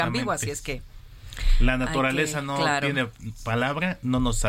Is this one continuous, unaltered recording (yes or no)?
yes